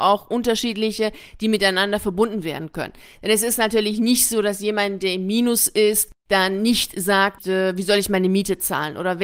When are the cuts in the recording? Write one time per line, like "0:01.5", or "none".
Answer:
none